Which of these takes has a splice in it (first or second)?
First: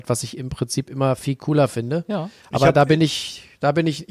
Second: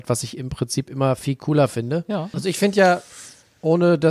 second